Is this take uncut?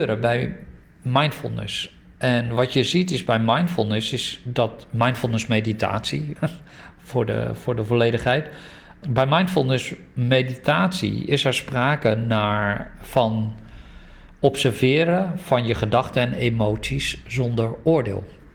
no; 2 cuts; at 6.4 s, 9.0 s

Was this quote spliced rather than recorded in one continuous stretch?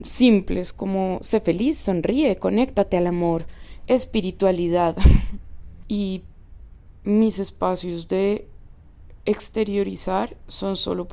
yes; 2 cuts; at 3.9 s, 5.8 s

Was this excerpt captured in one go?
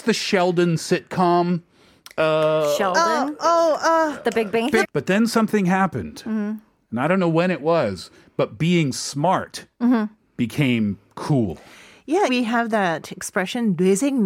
no; 2 cuts; at 4.8 s, 12.3 s

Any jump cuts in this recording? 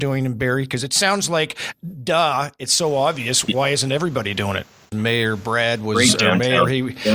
yes; 1 cut; at 4.9 s

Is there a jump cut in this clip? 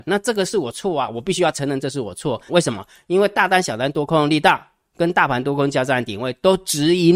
yes; 1 cut; at 2.5 s

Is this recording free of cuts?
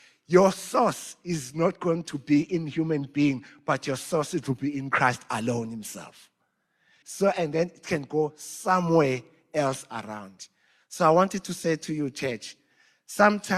no; 1 cut; at 7.0 s

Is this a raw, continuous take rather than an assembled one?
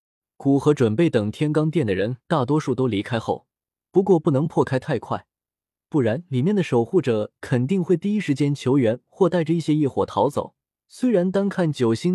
no; 2 cuts; at 3.9 s, 10.8 s

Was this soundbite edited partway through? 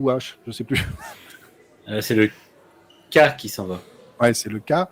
no; 0 cuts

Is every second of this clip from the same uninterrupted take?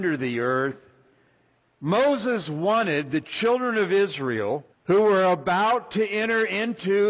no; 2 cuts; at 1.6 s, 4.7 s

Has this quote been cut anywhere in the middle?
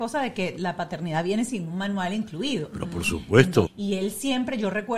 yes; 1 cut; at 3.7 s

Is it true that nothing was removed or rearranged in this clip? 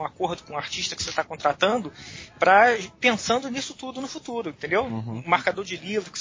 yes; 0 cuts

